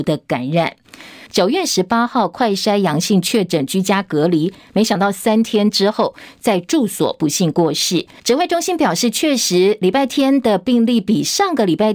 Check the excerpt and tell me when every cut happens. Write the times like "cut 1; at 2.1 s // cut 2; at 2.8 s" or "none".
cut 1; at 1.3 s // cut 2; at 8.2 s